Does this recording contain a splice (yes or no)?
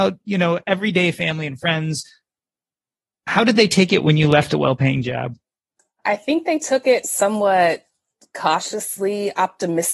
no